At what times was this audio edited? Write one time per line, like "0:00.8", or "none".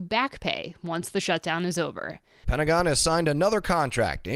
0:02.4